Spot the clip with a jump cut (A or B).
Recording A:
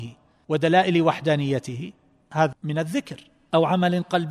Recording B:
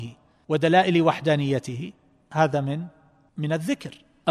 A